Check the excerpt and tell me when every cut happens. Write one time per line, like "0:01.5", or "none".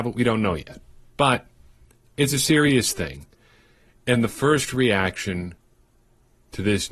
none